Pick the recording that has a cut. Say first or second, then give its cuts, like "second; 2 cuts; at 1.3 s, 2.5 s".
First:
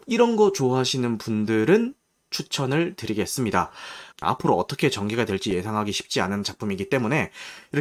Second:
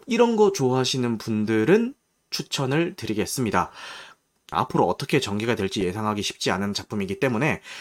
first; 1 cut; at 4.1 s